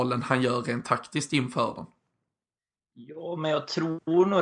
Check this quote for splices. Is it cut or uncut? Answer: uncut